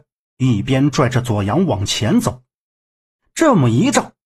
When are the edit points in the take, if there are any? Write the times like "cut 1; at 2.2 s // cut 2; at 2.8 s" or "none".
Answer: cut 1; at 3.2 s

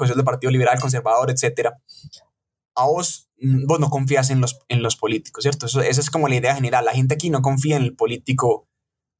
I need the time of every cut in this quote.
none

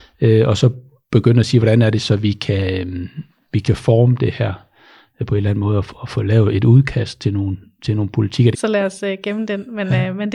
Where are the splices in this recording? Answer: cut 1; at 8.5 s

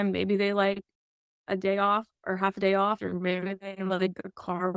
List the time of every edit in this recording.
cut 1; at 3.0 s

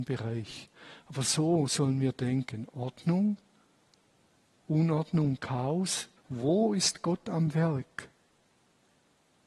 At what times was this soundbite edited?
cut 1; at 6.2 s

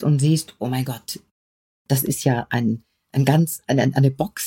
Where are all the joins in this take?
none

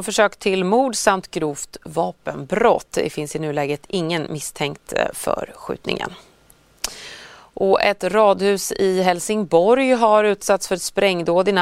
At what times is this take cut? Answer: none

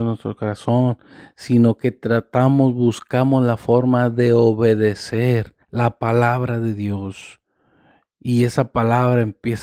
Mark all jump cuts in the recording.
cut 1; at 5.6 s

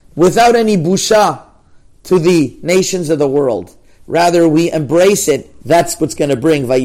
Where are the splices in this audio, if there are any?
cut 1; at 5.6 s

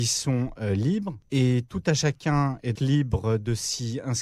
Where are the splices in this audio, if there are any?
cut 1; at 1.2 s // cut 2; at 2.8 s

